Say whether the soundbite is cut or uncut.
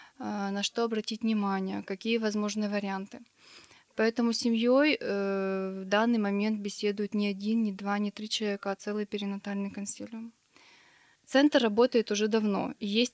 cut